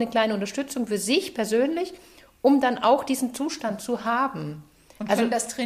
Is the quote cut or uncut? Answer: uncut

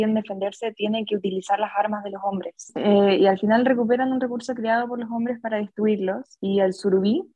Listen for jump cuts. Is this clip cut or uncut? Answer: uncut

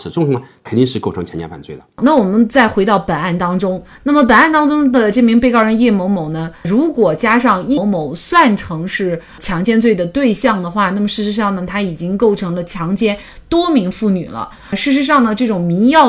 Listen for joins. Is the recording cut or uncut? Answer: cut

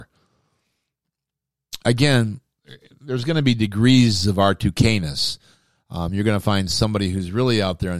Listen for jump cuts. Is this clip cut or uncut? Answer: uncut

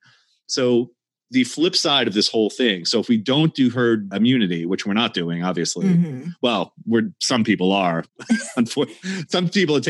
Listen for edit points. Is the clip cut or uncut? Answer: uncut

